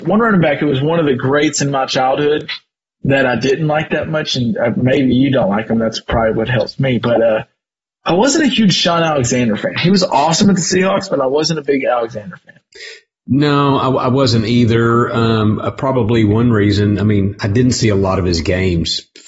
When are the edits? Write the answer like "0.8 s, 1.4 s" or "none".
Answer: none